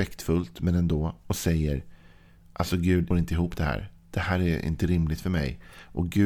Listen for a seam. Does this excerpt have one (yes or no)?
yes